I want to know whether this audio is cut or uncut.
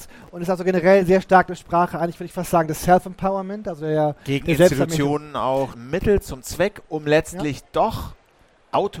cut